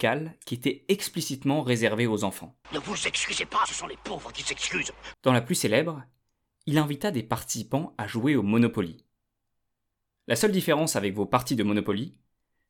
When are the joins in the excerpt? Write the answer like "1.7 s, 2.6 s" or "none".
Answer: 2.6 s, 5.1 s